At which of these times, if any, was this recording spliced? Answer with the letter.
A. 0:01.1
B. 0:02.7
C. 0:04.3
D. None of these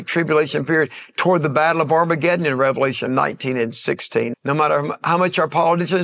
C